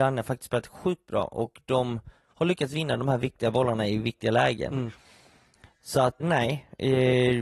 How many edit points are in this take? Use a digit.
1